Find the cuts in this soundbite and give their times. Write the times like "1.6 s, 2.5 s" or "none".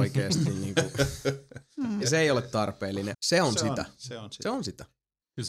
2.0 s, 3.1 s